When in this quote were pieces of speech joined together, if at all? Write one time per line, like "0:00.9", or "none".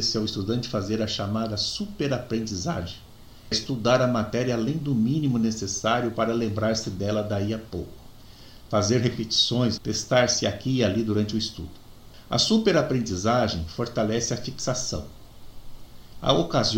0:03.5
0:09.8